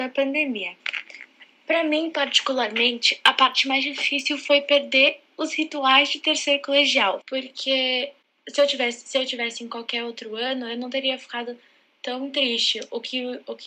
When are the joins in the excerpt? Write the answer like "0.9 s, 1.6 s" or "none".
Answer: 7.2 s